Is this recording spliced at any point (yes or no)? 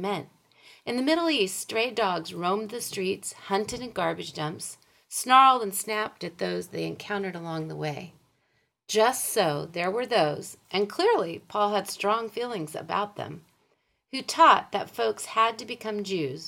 no